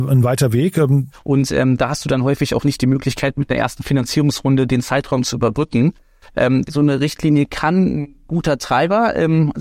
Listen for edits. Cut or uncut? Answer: cut